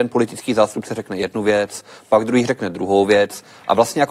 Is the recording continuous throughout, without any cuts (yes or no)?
yes